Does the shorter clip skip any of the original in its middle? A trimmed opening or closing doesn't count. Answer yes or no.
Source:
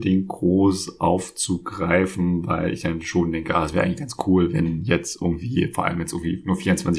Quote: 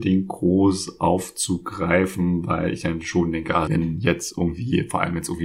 yes